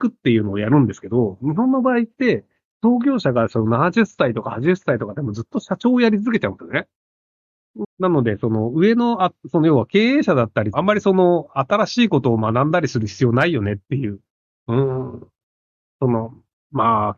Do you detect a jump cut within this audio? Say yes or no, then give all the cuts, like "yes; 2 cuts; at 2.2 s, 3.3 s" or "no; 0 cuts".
yes; 2 cuts; at 7.8 s, 10.7 s